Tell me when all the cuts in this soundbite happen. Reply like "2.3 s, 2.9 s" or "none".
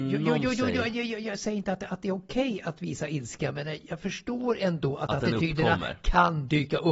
none